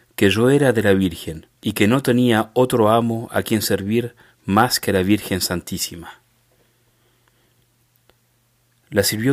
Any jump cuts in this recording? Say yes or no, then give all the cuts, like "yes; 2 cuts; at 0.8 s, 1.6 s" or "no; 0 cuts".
yes; 1 cut; at 1.6 s